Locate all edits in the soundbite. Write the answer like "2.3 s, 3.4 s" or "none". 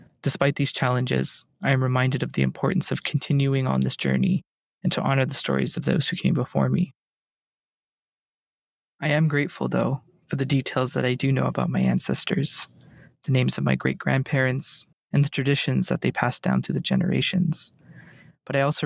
14.9 s